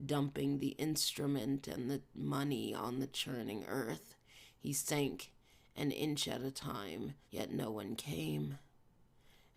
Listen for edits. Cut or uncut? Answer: cut